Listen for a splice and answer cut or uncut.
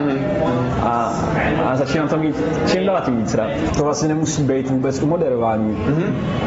cut